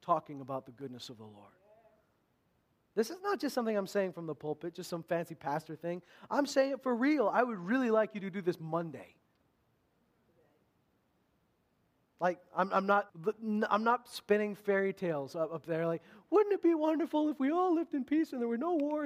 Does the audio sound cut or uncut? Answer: cut